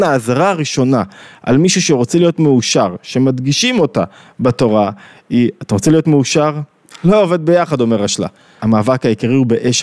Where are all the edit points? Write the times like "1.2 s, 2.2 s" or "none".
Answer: 7.0 s, 8.6 s